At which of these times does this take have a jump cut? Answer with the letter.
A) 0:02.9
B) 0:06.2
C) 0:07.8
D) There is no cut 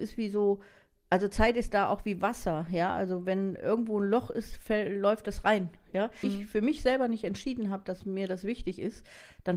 B